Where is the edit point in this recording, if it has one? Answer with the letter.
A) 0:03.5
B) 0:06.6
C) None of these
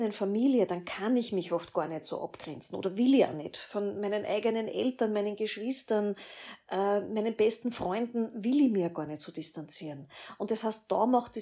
C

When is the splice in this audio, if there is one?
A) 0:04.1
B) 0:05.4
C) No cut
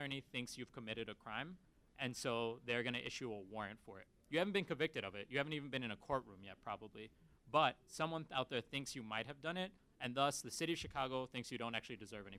C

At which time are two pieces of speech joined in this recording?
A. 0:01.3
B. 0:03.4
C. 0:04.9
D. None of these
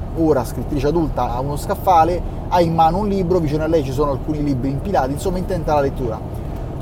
A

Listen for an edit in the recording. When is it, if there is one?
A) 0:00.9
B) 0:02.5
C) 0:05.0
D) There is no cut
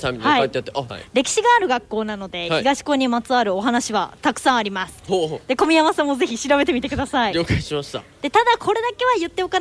A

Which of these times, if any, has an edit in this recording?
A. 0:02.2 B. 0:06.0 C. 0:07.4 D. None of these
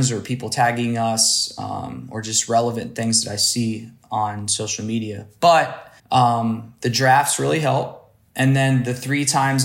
B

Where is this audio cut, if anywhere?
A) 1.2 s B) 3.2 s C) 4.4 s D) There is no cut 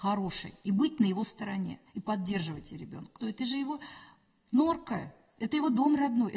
B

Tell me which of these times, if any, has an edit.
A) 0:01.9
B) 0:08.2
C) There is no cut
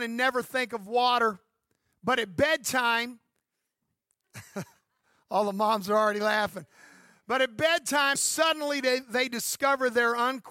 B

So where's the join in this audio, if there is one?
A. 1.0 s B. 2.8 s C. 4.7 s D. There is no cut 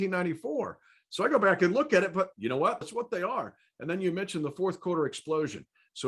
B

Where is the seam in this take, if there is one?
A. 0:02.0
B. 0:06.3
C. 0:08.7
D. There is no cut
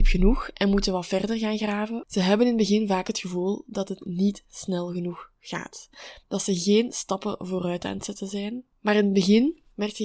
A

